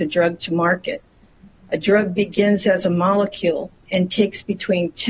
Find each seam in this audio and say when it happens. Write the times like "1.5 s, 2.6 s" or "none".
none